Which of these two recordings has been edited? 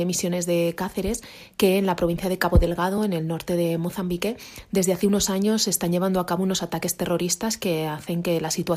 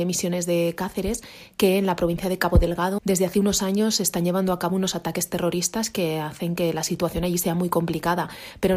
second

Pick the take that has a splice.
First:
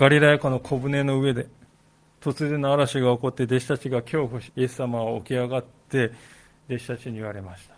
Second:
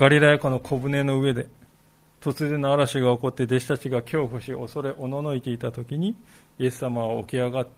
first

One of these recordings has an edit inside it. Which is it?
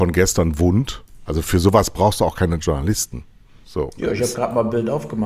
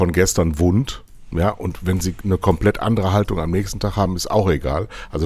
first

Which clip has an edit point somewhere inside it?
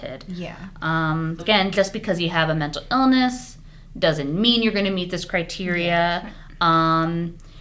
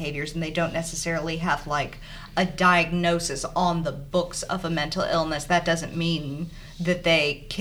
first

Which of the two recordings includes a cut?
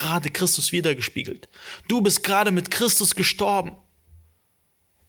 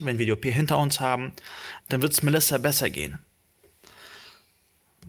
second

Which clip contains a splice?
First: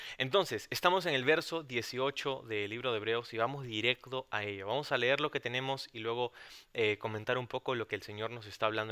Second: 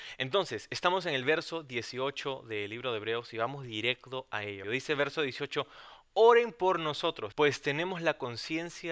second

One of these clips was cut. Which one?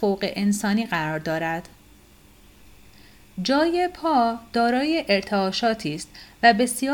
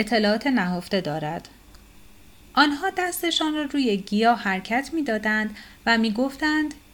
second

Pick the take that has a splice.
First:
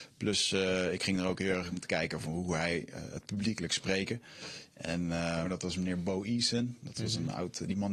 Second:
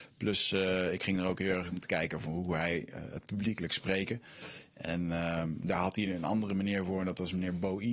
first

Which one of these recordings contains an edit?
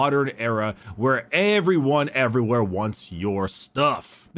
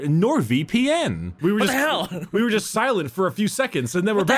second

